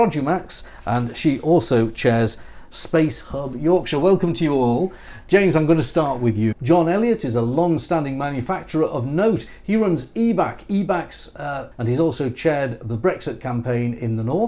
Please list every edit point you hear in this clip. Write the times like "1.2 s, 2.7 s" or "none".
6.5 s, 11.7 s